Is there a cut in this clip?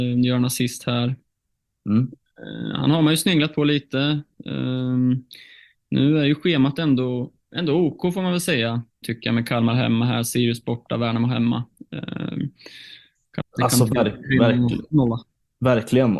yes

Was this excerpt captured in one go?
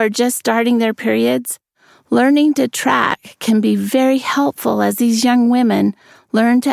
yes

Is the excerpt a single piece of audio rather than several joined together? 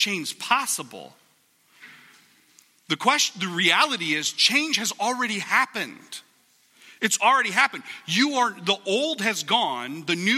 yes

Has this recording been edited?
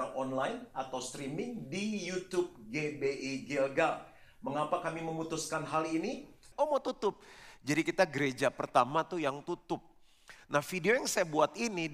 yes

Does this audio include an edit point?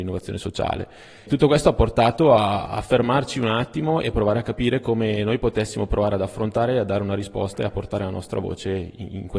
no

